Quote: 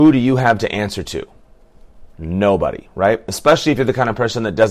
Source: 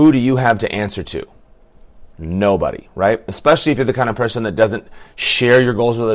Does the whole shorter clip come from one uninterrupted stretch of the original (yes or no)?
yes